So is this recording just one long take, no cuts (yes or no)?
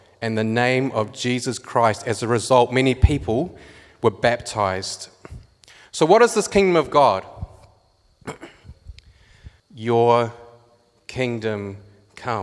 no